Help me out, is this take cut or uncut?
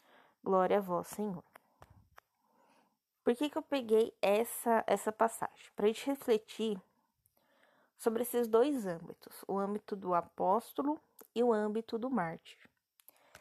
cut